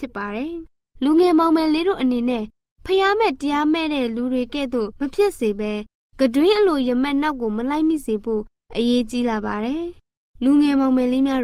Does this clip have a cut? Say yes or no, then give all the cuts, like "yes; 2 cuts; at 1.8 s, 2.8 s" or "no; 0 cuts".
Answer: no; 0 cuts